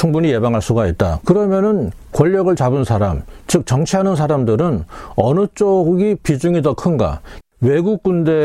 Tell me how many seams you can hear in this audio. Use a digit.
2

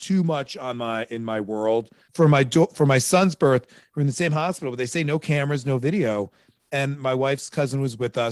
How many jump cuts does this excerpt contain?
1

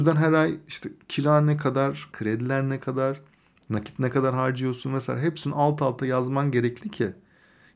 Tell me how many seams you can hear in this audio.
1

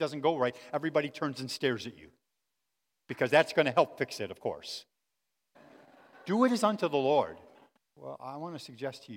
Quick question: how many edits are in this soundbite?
2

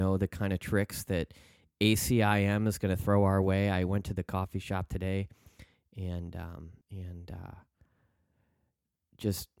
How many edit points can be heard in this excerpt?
1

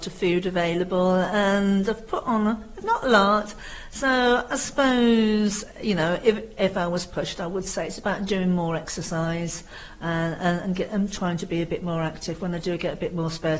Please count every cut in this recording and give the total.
1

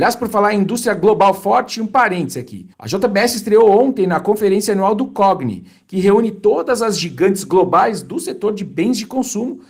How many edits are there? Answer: 1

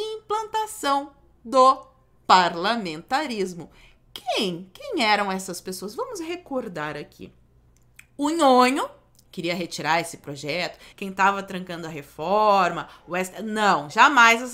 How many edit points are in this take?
2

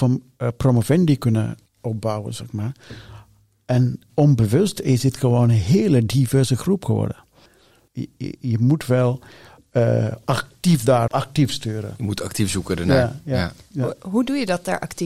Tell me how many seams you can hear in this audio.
2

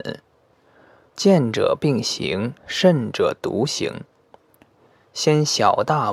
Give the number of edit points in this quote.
2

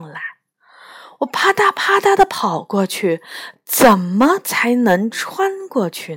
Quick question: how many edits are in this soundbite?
1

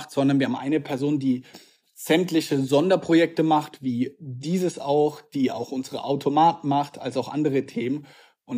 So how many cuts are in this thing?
0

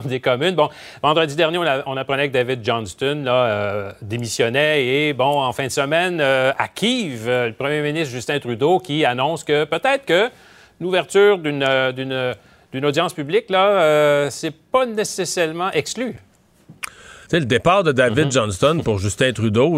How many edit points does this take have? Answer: 1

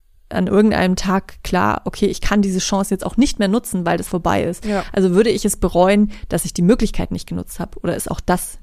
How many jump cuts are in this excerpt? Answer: 1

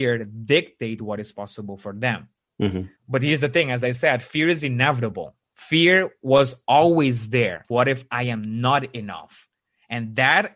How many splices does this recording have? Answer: 2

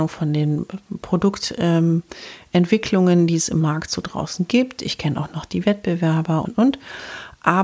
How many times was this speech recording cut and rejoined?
1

